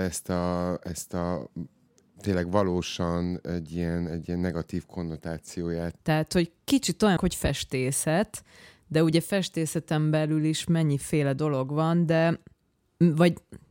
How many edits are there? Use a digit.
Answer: 2